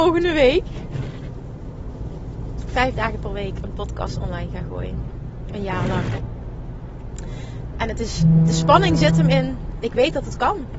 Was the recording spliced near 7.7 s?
yes; 1 cut; at 7.7 s

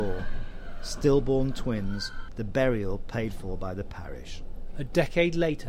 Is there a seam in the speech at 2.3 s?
yes; 1 cut; at 2.3 s

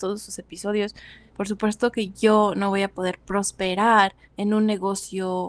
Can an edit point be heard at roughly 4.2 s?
yes; 2 cuts; at 1.3 s, 4.2 s

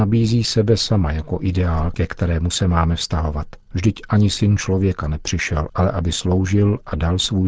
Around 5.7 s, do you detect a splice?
yes; 2 cuts; at 3.7 s, 5.7 s

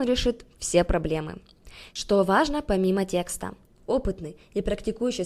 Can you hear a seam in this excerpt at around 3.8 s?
yes; 2 cuts; at 1.9 s, 3.8 s

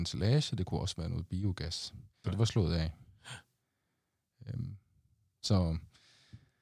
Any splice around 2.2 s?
yes; 1 cut; at 2.2 s

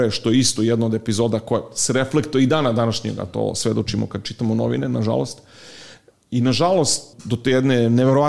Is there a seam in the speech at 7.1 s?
yes; 2 cuts; at 6.1 s, 7.1 s

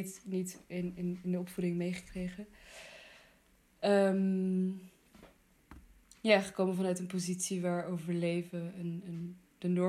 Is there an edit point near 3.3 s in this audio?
no; 0 cuts

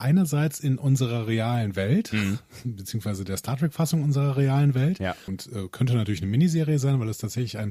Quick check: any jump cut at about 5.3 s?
yes; 1 cut; at 5.3 s

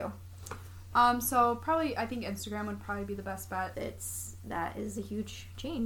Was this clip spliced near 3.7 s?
yes; 1 cut; at 3.7 s

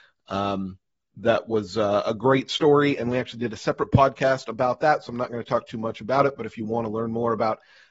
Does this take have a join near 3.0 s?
no; 0 cuts

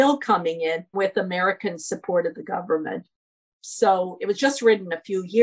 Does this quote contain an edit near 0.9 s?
yes; 2 cuts; at 0.9 s, 3.5 s

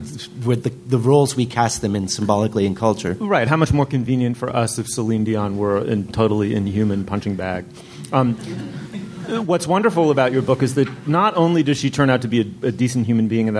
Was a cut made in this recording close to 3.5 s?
no; 0 cuts

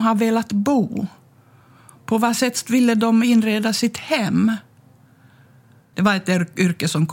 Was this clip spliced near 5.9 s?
yes; 1 cut; at 5.9 s

